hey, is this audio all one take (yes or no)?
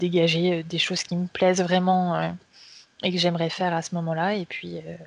yes